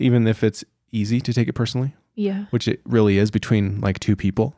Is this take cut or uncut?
uncut